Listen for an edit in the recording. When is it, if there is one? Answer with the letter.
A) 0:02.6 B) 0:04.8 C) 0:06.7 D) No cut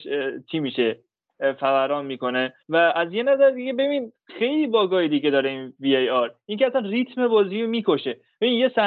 A